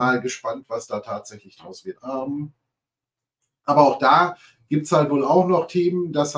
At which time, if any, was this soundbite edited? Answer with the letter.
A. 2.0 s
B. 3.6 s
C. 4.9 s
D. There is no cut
A